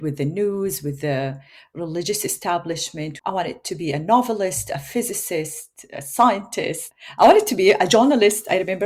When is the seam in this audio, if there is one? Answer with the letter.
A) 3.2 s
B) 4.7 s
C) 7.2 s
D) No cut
A